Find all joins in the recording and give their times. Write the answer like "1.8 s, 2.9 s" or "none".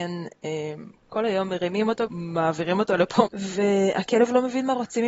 2.1 s, 3.3 s